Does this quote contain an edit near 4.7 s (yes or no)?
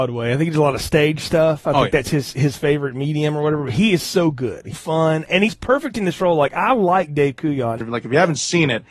yes